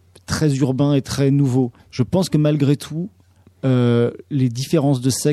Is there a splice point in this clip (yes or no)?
yes